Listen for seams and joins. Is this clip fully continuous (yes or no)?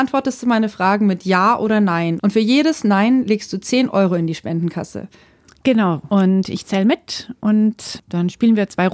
no